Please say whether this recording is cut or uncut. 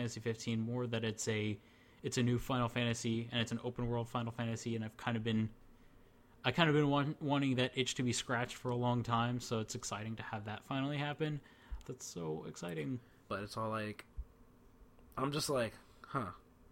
cut